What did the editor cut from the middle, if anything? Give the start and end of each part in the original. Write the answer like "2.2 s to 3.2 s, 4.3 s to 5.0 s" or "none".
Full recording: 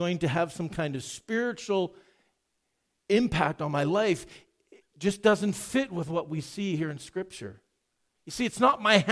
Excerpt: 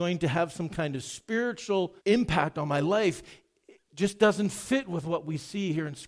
2.0 s to 3.0 s